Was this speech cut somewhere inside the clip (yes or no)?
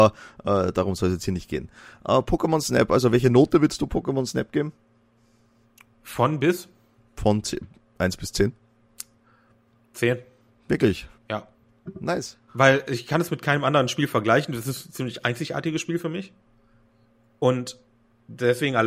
yes